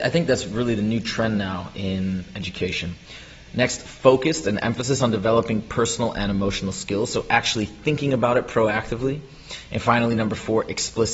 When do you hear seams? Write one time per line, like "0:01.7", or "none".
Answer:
none

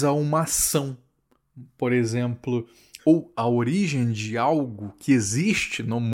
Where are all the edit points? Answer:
0:03.0

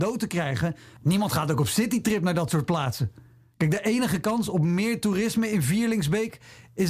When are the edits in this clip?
0:01.0

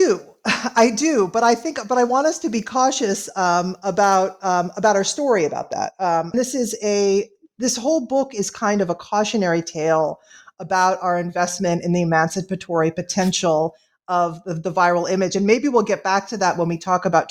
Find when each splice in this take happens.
0:06.3

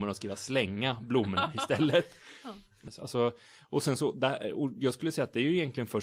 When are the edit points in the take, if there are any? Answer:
0:02.9

